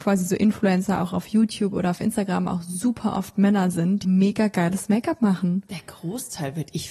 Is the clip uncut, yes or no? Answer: no